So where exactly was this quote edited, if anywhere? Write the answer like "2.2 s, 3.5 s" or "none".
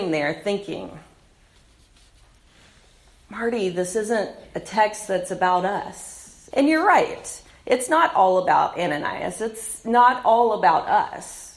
6.5 s